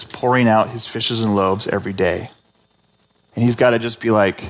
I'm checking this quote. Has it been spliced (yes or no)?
yes